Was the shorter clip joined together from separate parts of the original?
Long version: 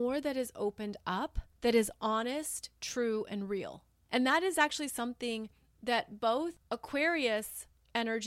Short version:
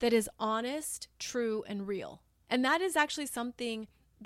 no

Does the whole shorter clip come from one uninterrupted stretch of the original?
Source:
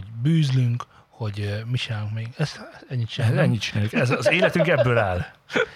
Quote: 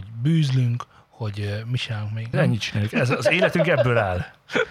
no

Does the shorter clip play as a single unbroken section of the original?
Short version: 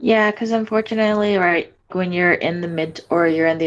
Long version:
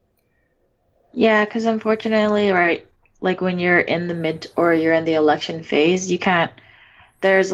no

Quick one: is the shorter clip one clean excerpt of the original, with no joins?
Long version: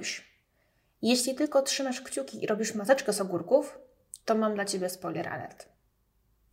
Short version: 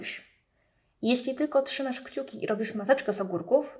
yes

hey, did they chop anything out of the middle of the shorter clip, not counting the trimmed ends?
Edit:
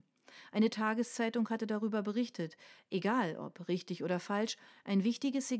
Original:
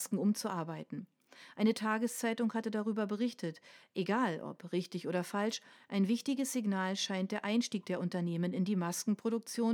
no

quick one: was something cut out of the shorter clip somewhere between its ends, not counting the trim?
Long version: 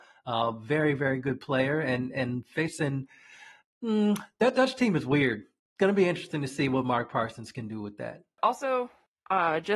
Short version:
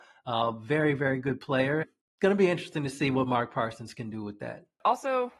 yes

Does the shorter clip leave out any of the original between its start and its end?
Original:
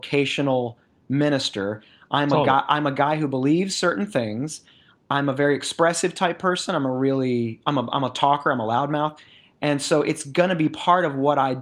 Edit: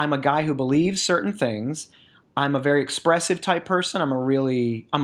no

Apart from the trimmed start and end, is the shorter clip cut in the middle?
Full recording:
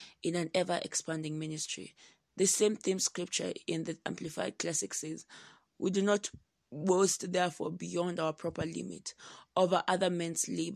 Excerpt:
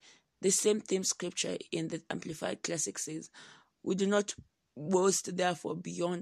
no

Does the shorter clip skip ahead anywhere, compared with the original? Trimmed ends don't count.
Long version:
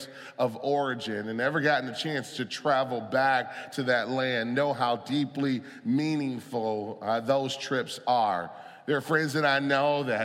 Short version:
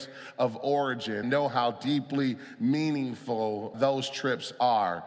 yes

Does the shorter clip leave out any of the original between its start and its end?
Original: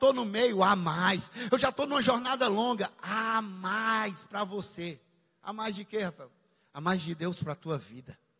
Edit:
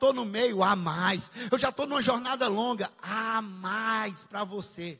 no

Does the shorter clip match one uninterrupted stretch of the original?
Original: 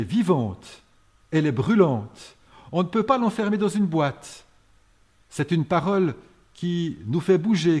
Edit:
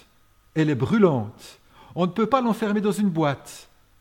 yes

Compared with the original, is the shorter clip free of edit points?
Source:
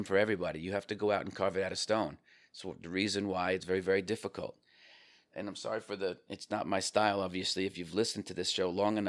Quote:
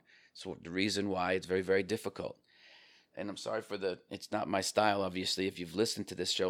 yes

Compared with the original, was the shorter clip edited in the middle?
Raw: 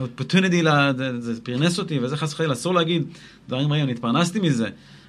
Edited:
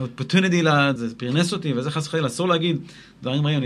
yes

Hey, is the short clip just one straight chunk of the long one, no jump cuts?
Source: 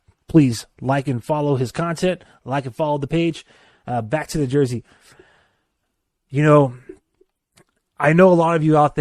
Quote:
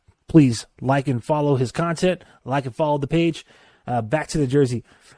yes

